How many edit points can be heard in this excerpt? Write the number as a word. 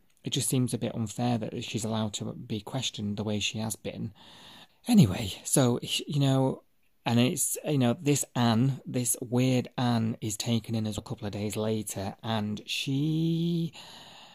two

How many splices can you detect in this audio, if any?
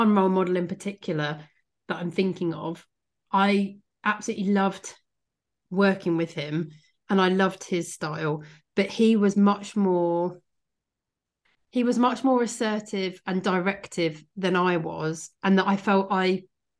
zero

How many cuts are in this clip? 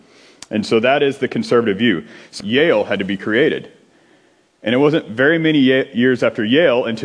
one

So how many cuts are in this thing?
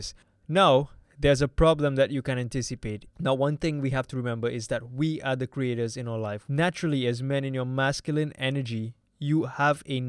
two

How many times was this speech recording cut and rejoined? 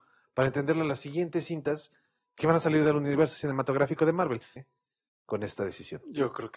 one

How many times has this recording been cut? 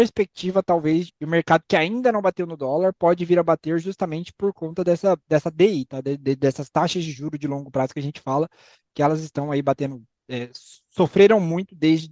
one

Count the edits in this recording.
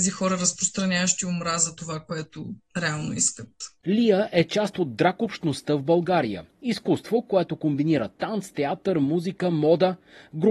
zero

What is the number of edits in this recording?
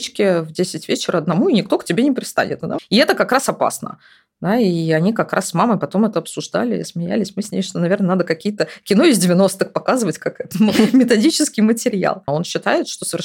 two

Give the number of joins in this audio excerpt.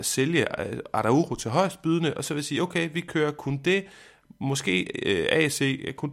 zero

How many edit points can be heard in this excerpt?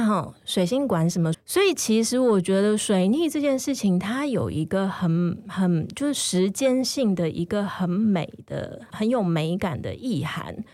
two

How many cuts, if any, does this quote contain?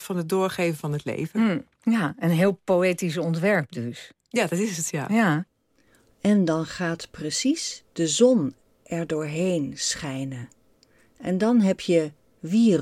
zero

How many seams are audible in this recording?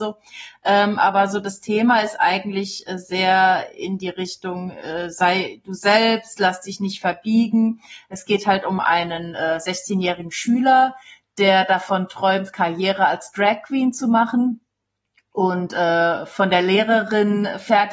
zero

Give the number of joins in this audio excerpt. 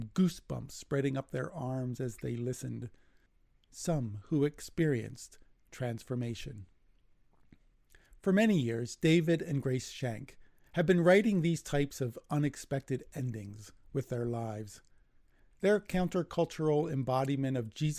zero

